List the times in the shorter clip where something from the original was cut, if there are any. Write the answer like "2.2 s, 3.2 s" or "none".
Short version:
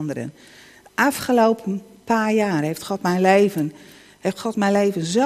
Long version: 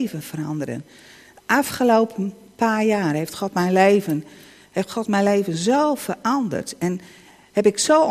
none